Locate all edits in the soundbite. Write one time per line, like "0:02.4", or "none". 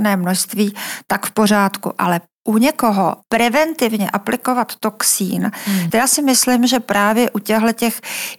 0:05.9